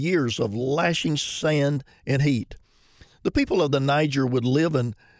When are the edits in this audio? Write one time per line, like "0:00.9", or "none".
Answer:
none